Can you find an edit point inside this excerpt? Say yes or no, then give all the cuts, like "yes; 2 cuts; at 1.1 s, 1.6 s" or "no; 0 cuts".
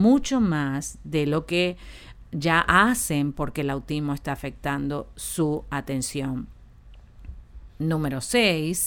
no; 0 cuts